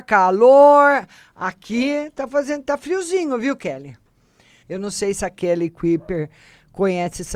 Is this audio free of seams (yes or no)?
no